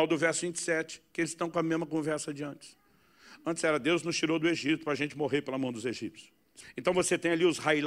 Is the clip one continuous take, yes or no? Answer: no